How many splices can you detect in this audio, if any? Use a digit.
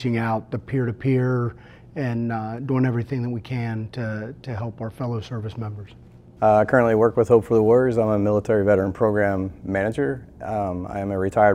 1